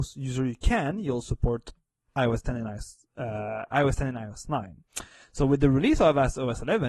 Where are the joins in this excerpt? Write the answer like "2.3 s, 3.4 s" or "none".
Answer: none